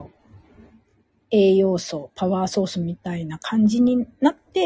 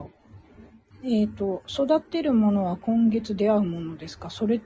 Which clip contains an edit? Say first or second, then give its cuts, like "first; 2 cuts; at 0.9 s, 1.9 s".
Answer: second; 1 cut; at 0.9 s